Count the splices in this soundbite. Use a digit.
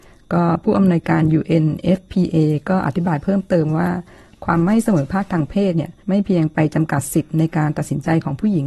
1